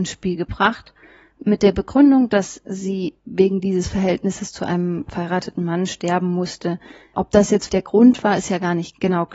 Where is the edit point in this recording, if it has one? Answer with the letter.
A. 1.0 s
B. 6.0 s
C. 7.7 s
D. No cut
C